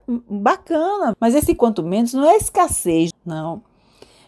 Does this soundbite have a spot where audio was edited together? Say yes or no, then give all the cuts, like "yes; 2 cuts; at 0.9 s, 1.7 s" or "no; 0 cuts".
yes; 2 cuts; at 1.1 s, 3.1 s